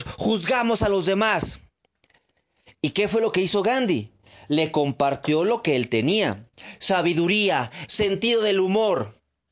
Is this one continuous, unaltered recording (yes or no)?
no